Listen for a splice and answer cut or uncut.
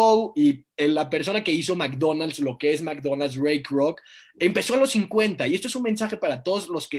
uncut